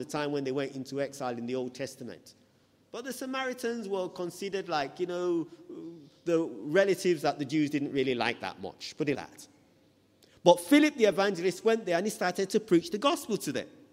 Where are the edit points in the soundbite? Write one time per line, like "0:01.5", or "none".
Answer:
0:09.1